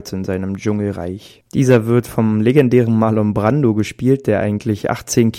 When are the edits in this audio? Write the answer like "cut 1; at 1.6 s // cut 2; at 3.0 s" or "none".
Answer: none

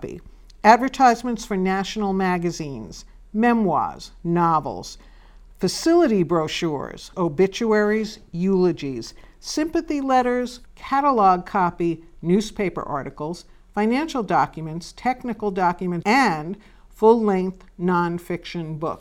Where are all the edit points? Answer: cut 1; at 7.1 s // cut 2; at 10.7 s // cut 3; at 16.0 s

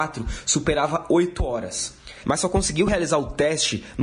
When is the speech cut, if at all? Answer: cut 1; at 2.2 s

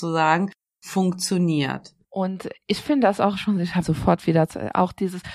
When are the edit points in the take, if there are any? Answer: cut 1; at 2.0 s // cut 2; at 3.8 s

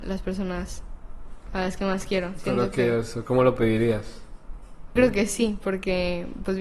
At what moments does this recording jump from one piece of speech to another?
cut 1; at 5.0 s

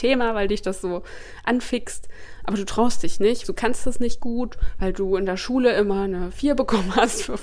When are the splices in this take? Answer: cut 1; at 3.4 s

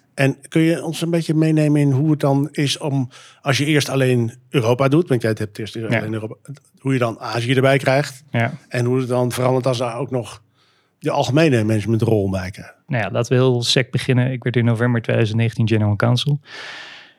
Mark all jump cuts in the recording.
none

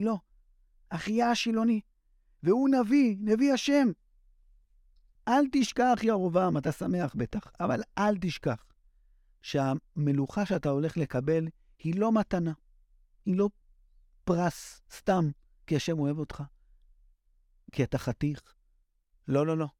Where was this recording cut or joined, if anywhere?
cut 1; at 5.2 s

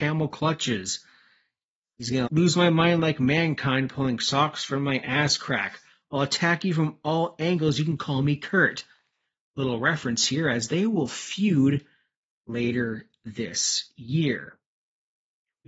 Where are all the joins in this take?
cut 1; at 2.3 s

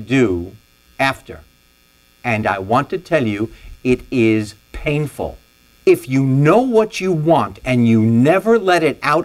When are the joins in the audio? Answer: cut 1; at 3.7 s // cut 2; at 5.7 s

